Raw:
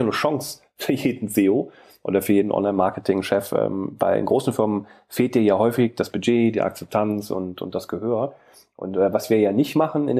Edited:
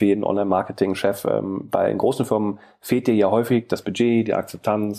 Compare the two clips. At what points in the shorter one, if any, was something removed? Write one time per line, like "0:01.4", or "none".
none